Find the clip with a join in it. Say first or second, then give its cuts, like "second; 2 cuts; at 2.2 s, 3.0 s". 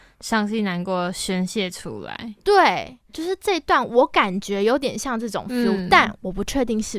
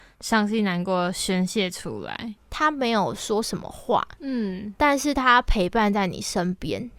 second; 1 cut; at 2.4 s